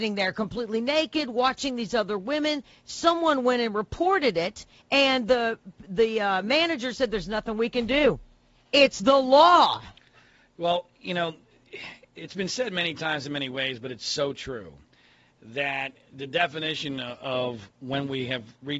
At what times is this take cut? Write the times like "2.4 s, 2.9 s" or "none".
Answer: none